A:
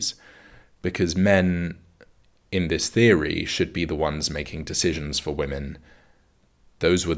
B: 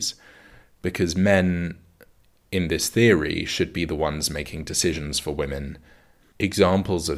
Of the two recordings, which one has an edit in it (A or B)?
B